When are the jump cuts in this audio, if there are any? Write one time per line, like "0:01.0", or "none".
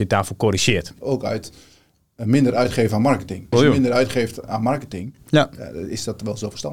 0:01.0
0:03.5